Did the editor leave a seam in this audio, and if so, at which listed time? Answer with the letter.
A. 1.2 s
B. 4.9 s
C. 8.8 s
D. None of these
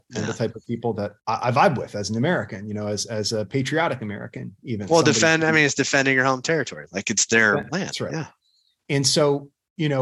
A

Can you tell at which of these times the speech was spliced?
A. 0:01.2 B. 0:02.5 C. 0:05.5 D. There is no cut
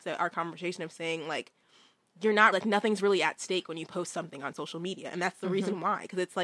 B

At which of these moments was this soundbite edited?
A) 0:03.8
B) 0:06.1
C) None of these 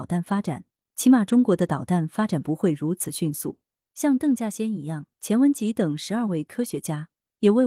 A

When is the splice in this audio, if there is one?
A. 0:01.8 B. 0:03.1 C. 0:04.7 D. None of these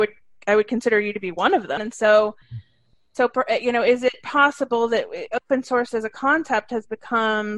A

